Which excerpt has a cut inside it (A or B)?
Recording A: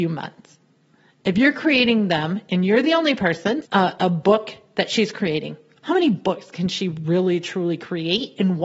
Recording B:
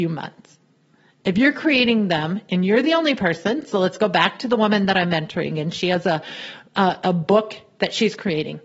A